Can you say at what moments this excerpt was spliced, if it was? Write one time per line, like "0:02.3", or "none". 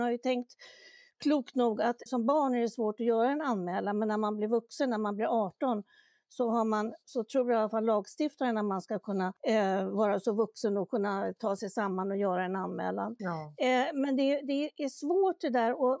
0:02.1